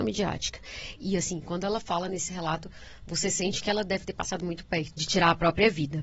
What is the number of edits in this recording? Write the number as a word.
two